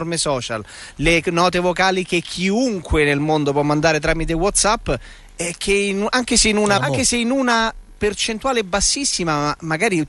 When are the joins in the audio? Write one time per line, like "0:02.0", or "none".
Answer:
0:06.8